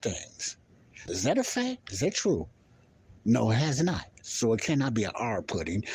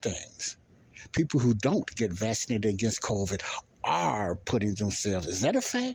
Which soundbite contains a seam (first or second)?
first